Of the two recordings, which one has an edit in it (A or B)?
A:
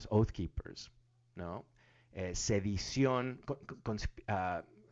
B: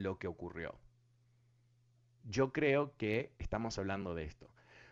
B